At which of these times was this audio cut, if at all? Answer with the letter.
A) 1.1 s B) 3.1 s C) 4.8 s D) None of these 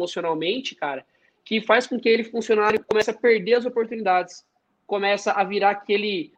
D